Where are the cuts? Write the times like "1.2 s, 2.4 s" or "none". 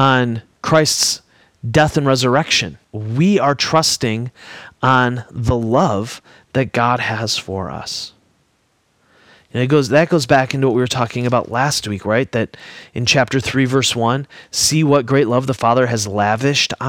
2.8 s